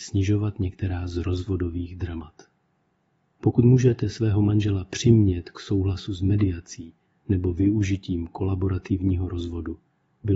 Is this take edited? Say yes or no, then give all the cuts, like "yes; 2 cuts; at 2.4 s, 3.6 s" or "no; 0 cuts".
no; 0 cuts